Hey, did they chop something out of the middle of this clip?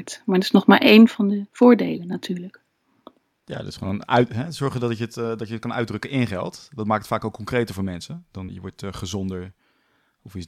yes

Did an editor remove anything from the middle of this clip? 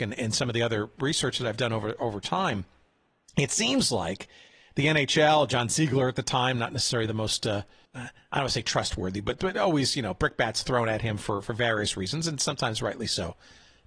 yes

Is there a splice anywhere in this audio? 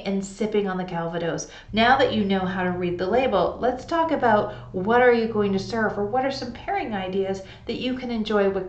yes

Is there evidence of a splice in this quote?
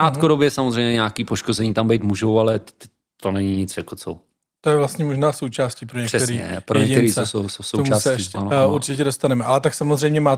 yes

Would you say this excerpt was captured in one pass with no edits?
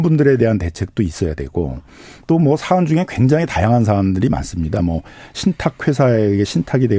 yes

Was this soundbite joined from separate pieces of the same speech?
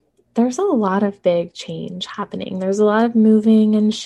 no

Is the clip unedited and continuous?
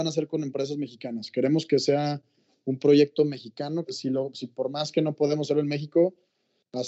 no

